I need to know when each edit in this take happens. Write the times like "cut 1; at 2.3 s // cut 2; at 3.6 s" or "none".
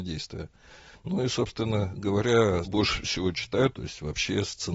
cut 1; at 0.9 s // cut 2; at 2.6 s // cut 3; at 3.7 s